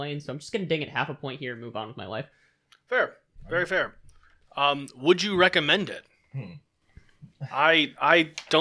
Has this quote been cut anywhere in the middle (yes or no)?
no